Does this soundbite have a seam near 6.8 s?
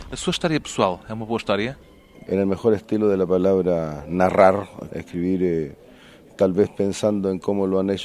no; 2 cuts; at 2.3 s, 4.9 s

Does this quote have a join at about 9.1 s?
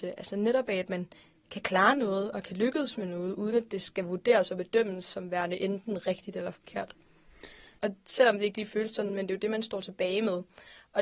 yes; 2 cuts; at 7.8 s, 9.1 s

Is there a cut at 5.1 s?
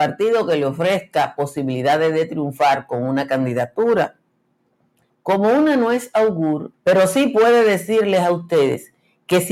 yes; 2 cuts; at 5.1 s, 6.7 s

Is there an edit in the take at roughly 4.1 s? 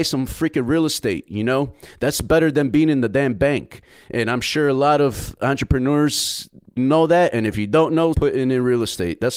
no; 2 cuts; at 6.8 s, 8.1 s

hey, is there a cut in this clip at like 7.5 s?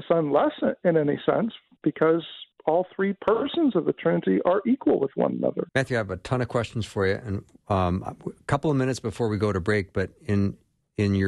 no; 1 cut; at 5.7 s

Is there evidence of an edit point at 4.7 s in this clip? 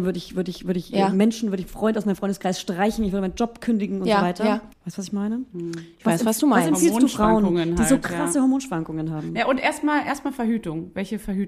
yes; 1 cut; at 4.7 s

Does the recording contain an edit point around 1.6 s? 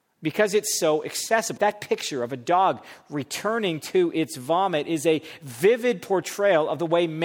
yes; 1 cut; at 1.6 s

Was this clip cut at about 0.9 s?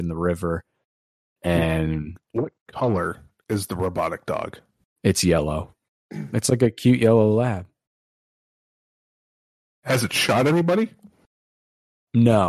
no; 0 cuts

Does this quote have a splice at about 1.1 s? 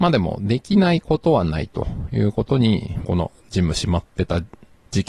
no; 1 cut; at 3.0 s

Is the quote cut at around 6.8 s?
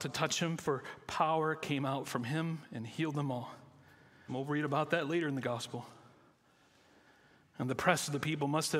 no; 1 cut; at 4.3 s

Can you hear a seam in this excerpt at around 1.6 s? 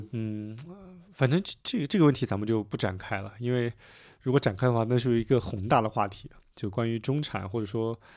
no; 0 cuts

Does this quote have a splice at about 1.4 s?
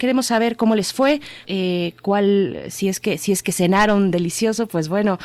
yes; 1 cut; at 1.4 s

